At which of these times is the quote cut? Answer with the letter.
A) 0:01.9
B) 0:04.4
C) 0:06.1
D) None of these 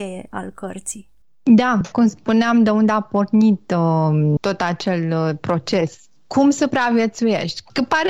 A